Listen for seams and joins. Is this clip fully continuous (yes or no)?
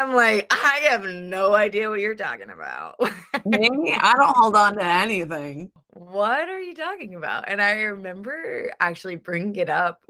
yes